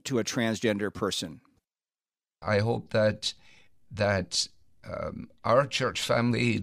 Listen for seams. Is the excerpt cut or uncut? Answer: cut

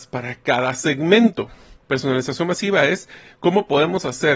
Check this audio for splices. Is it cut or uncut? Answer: cut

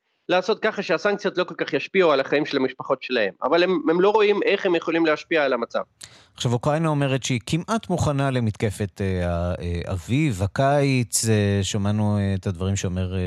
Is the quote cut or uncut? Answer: uncut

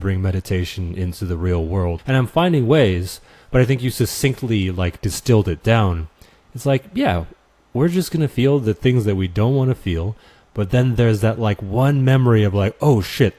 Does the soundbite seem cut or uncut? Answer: cut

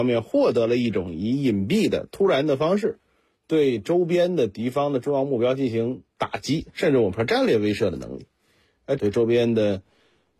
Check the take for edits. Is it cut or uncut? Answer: cut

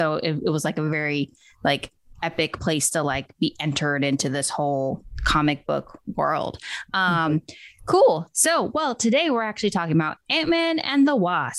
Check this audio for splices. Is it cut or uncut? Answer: uncut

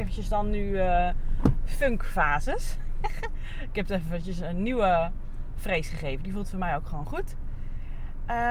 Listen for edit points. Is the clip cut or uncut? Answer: uncut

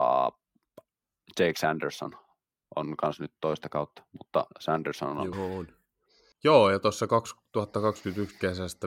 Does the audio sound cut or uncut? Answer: cut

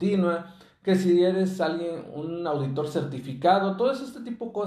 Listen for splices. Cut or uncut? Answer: uncut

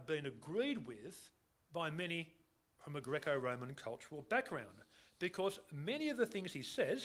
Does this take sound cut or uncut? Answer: uncut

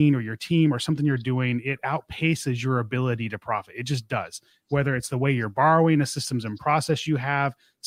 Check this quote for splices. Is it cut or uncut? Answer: uncut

